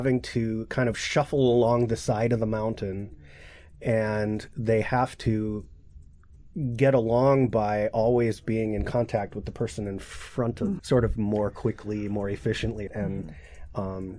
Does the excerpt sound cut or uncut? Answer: cut